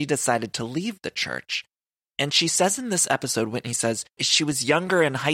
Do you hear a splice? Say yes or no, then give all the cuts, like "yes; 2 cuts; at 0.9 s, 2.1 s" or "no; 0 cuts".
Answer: yes; 1 cut; at 4.2 s